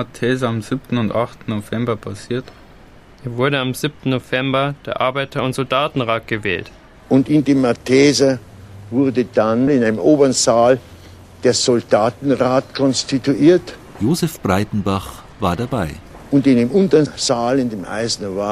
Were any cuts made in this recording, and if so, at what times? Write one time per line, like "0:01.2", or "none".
none